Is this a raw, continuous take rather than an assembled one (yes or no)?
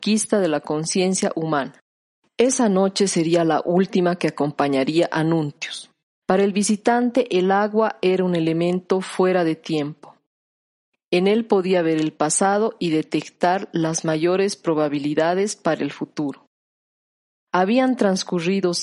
no